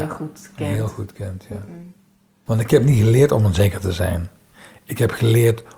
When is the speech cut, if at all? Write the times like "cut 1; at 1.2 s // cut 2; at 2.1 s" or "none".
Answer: cut 1; at 2.5 s